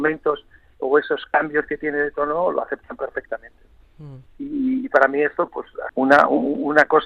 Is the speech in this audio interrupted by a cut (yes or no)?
yes